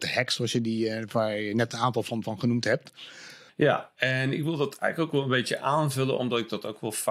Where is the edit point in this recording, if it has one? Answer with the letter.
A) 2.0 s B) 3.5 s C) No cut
B